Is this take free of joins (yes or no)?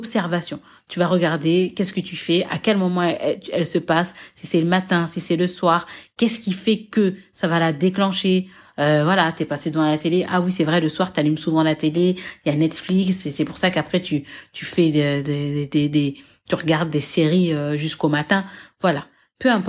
yes